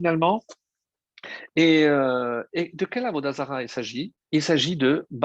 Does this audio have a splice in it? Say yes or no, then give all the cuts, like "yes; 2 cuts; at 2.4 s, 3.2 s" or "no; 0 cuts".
yes; 1 cut; at 4.2 s